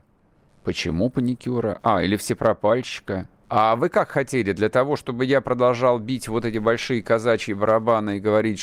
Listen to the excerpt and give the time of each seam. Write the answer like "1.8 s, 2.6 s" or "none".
3.4 s